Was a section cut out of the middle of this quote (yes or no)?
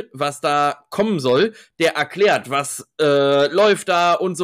no